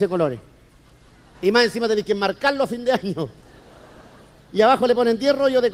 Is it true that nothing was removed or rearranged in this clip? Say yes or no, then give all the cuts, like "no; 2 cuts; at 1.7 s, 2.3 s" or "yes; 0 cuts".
no; 1 cut; at 1.3 s